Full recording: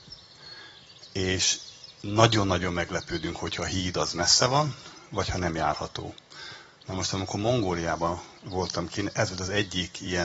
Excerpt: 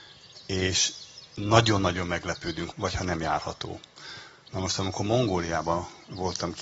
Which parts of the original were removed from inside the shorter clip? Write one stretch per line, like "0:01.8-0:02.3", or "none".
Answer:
0:03.4-0:05.1